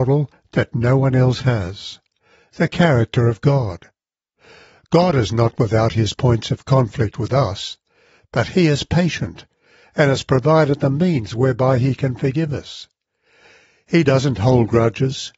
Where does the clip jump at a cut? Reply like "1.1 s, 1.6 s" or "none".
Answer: none